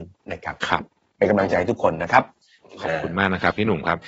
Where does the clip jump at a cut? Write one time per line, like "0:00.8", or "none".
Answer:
none